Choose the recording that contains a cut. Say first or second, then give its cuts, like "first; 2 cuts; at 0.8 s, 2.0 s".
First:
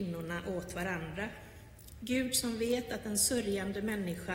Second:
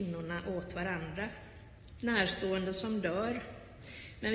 second; 1 cut; at 2.0 s